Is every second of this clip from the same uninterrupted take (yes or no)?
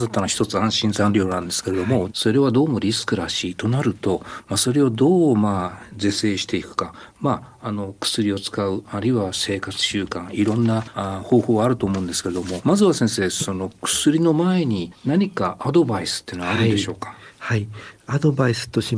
no